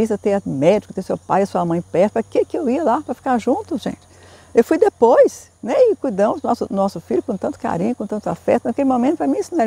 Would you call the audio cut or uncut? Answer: uncut